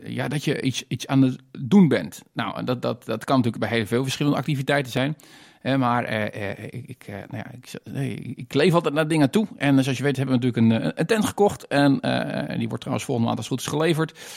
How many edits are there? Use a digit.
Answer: 0